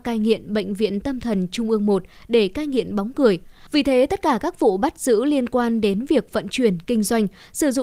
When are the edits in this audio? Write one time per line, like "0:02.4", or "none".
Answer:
0:03.7